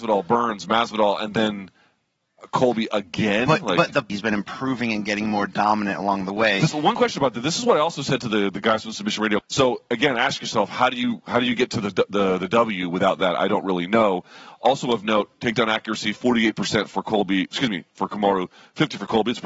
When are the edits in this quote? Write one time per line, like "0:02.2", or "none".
0:04.1
0:09.4